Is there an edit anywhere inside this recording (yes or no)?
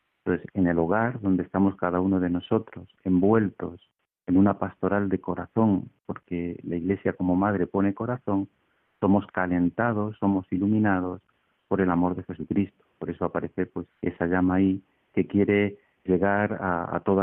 yes